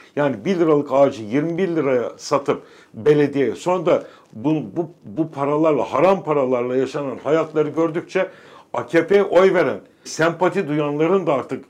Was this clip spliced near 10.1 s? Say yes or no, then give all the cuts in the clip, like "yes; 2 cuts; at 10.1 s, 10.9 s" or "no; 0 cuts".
yes; 1 cut; at 10.1 s